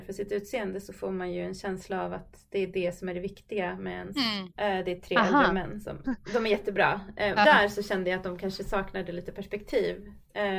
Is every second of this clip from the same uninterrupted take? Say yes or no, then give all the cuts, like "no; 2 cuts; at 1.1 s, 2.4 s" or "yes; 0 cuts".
no; 3 cuts; at 4.5 s, 6.0 s, 7.4 s